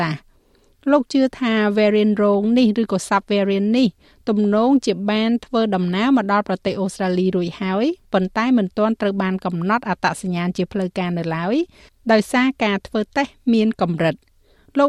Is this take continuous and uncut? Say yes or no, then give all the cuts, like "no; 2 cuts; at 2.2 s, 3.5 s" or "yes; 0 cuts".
yes; 0 cuts